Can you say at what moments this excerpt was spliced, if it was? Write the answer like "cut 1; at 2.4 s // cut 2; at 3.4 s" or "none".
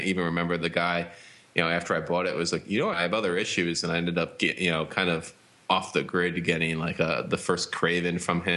cut 1; at 2.9 s